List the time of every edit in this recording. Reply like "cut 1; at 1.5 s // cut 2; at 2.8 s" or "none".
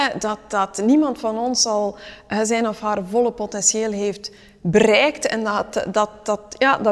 none